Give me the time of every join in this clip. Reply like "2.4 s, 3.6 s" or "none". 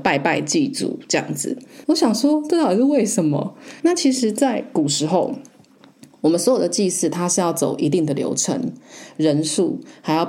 1.8 s, 3.8 s